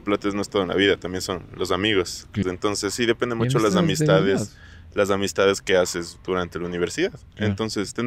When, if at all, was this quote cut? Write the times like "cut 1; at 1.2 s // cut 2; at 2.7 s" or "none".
cut 1; at 2.4 s